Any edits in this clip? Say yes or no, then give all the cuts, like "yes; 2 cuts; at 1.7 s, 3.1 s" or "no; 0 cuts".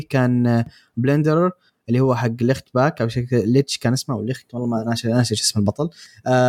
no; 0 cuts